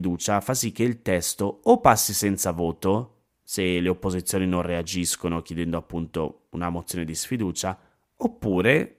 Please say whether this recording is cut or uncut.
uncut